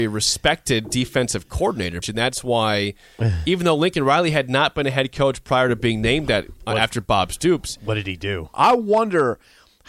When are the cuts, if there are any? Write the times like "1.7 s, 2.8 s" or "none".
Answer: 2.0 s, 8.5 s